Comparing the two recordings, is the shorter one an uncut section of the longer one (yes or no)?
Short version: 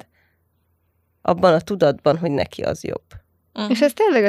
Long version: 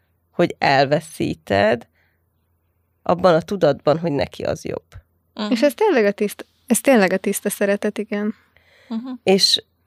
yes